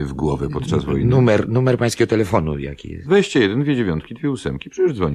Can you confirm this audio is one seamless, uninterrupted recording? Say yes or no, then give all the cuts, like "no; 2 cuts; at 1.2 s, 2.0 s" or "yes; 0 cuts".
yes; 0 cuts